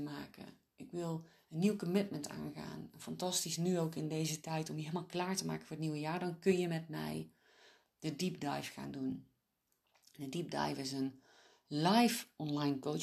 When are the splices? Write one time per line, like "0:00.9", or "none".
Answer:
none